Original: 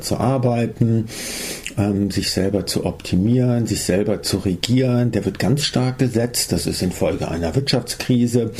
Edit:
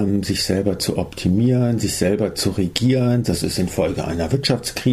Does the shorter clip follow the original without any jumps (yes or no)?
no